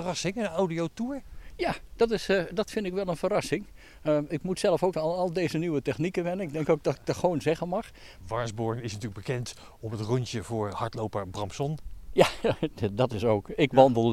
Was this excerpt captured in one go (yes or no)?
no